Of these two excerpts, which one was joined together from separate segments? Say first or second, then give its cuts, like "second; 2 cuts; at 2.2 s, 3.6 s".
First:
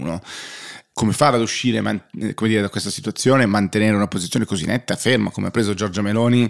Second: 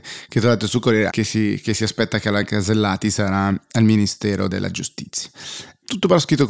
second; 2 cuts; at 1.1 s, 4.5 s